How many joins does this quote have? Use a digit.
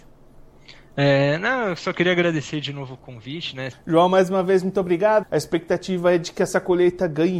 2